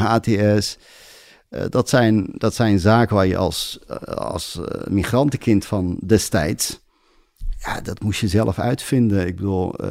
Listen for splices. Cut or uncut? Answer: uncut